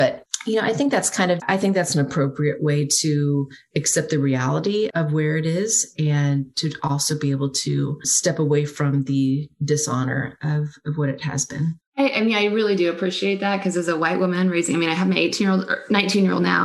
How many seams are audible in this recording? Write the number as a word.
one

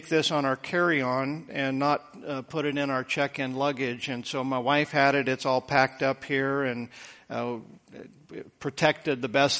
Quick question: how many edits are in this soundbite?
zero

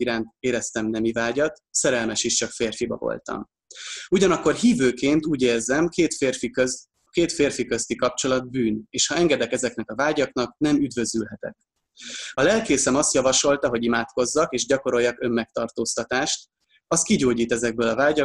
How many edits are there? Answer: zero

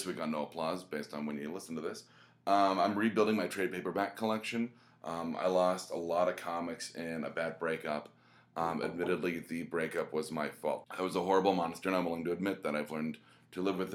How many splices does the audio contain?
one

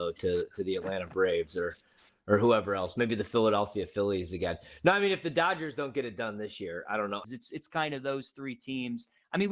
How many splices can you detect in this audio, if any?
one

